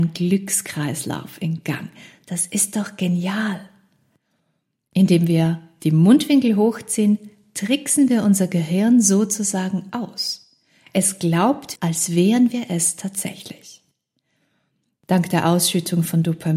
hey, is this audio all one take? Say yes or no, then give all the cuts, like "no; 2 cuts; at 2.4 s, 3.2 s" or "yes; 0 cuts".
no; 2 cuts; at 4.8 s, 11.8 s